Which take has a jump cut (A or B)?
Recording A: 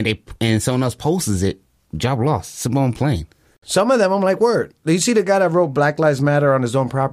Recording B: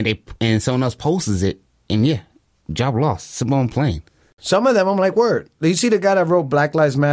A